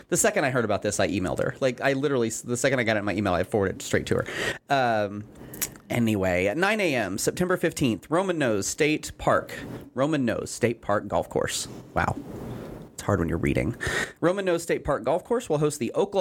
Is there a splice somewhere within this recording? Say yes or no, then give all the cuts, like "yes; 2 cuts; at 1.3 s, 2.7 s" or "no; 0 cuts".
no; 0 cuts